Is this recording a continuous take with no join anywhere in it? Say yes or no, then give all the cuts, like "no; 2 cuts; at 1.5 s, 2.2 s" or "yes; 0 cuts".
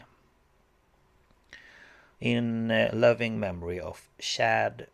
no; 1 cut; at 2.2 s